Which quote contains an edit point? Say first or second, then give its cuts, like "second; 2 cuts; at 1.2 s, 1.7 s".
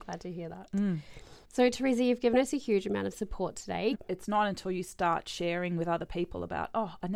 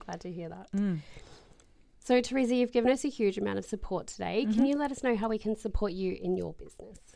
first; 2 cuts; at 1.4 s, 3.9 s